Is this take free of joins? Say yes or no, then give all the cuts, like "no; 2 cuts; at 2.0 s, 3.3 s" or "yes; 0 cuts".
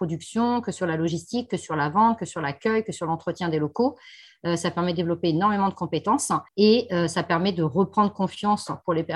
no; 1 cut; at 6.5 s